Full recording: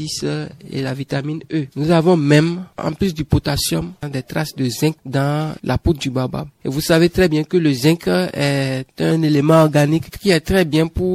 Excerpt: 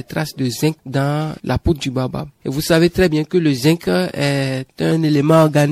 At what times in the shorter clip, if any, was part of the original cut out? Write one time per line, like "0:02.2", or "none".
none